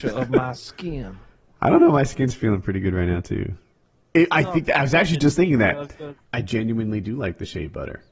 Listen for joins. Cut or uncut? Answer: cut